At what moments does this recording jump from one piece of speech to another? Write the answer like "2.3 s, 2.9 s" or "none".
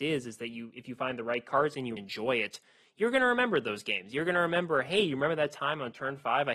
2.0 s

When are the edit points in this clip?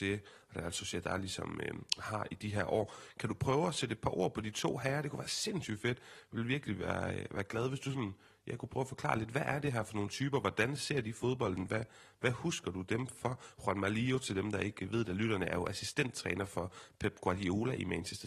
none

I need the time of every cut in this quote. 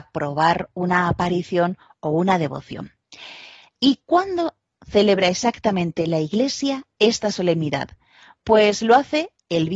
none

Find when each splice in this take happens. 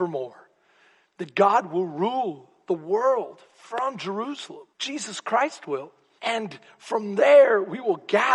4.7 s, 6.2 s

